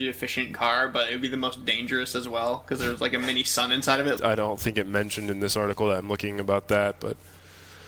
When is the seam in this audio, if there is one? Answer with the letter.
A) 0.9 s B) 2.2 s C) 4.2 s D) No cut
C